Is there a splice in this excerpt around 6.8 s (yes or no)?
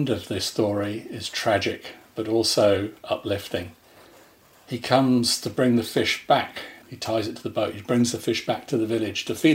yes